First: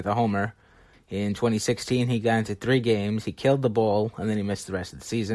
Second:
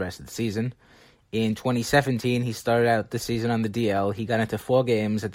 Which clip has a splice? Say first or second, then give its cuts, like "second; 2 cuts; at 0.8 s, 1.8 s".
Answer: first; 1 cut; at 0.9 s